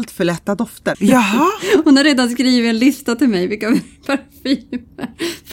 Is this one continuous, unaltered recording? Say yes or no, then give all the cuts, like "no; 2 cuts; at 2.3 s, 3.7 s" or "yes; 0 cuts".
no; 1 cut; at 0.9 s